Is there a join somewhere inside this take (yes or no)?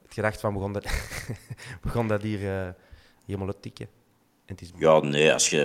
yes